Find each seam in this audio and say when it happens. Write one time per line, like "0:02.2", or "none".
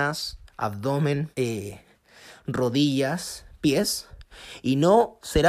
0:01.3